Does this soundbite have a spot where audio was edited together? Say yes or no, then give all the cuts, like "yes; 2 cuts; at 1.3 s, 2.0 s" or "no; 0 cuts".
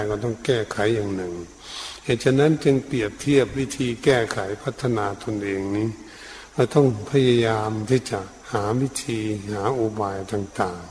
yes; 1 cut; at 8.4 s